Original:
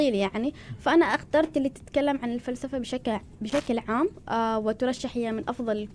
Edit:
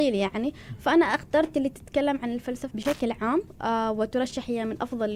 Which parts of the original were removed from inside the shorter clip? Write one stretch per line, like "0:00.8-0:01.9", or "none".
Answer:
0:02.7-0:03.4